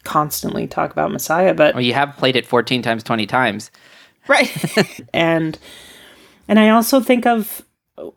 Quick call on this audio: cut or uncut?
cut